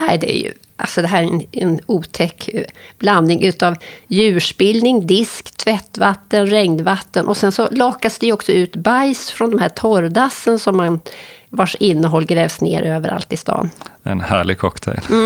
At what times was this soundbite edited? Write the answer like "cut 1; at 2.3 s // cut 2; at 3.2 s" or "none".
none